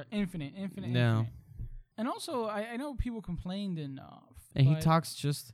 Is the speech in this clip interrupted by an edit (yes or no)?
yes